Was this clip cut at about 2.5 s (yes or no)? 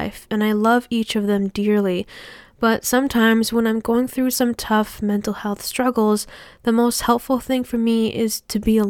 no